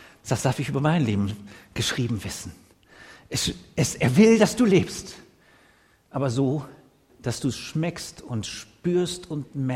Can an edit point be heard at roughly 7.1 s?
yes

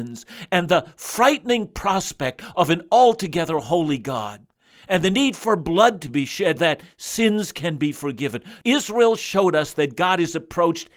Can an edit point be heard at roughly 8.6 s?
yes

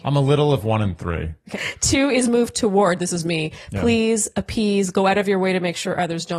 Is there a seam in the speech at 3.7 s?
no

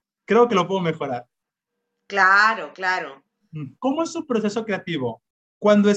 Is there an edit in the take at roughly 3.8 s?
yes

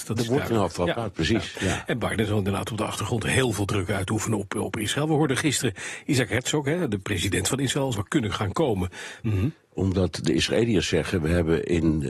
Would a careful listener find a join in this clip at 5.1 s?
no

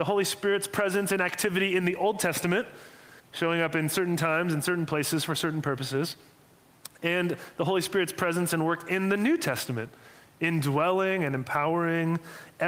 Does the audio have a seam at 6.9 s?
no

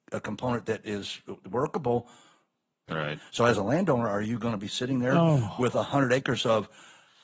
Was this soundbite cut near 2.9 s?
yes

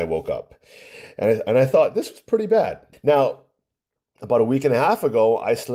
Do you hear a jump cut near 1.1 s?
no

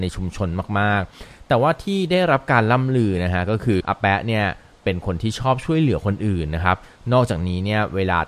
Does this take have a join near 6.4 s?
no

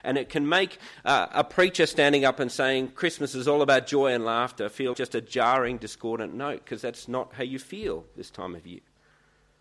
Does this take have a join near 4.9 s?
yes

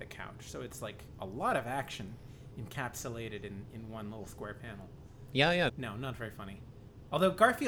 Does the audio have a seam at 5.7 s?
yes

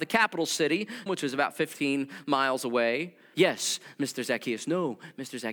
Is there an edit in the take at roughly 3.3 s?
yes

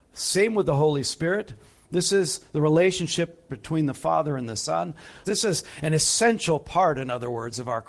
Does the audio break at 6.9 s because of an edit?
no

